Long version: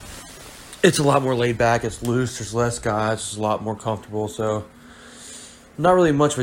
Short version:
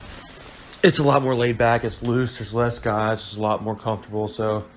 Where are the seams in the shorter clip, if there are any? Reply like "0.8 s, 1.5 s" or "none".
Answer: none